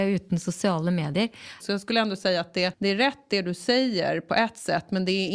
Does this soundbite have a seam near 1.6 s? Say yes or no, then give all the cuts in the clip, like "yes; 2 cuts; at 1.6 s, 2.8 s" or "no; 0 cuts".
yes; 1 cut; at 1.6 s